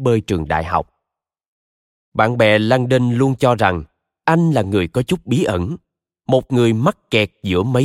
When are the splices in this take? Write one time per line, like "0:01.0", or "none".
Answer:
none